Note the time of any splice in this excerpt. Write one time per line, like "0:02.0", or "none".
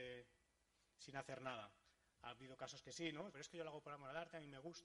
0:03.3